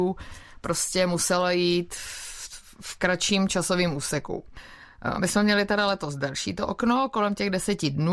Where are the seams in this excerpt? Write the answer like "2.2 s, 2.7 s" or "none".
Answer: none